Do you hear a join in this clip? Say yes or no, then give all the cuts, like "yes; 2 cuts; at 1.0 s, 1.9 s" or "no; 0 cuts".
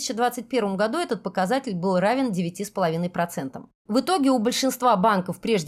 yes; 1 cut; at 3.7 s